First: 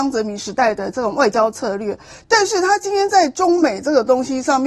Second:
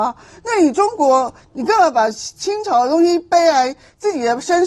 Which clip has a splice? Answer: second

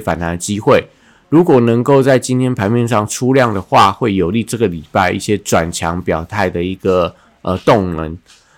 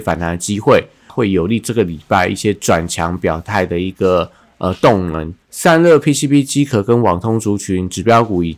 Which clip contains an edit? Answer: second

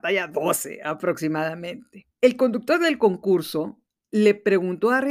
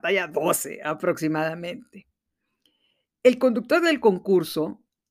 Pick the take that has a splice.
first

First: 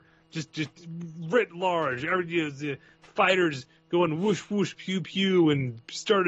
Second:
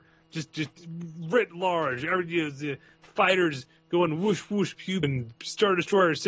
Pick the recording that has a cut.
second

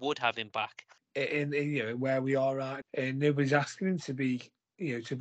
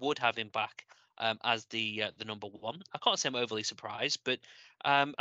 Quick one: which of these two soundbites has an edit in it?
first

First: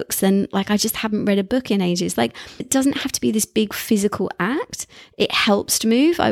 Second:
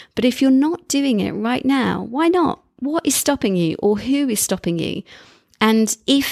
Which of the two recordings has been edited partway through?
first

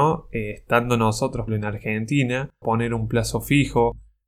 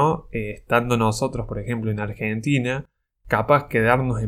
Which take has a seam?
first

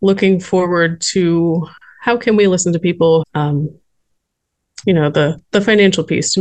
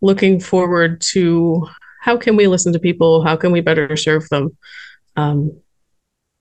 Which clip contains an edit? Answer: first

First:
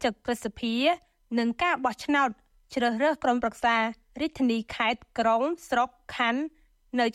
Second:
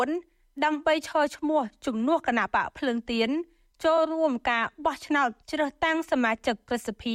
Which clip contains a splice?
second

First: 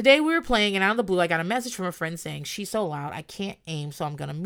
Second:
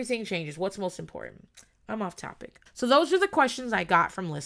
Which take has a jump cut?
second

